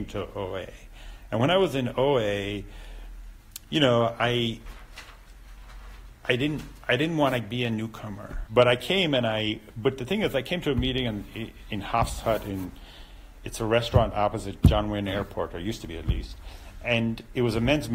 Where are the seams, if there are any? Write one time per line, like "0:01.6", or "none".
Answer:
0:08.5